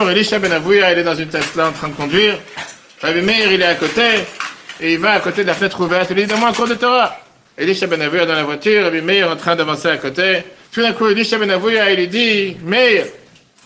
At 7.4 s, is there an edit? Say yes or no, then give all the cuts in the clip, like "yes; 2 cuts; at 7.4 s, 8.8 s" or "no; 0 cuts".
yes; 2 cuts; at 7.4 s, 10.7 s